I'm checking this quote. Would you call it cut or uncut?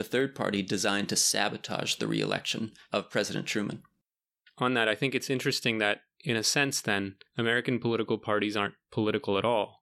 uncut